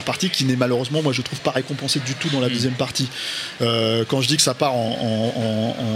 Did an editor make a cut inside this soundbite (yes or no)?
no